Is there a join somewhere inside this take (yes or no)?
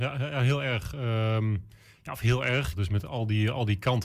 yes